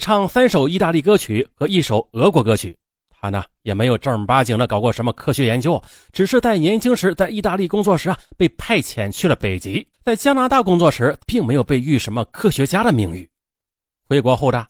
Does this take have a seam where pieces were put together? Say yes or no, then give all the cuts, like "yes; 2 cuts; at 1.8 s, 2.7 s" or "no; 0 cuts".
yes; 2 cuts; at 9.9 s, 11.2 s